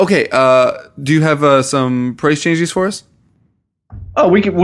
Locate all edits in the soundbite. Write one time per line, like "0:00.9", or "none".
none